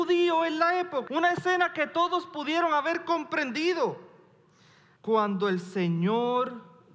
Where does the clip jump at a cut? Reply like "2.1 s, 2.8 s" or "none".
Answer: 1.1 s, 5.0 s